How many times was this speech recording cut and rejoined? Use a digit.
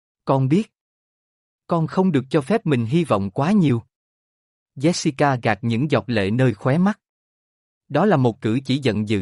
1